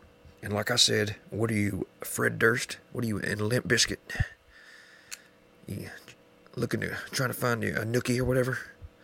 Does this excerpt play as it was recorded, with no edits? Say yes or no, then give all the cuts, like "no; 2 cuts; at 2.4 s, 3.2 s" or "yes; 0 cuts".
yes; 0 cuts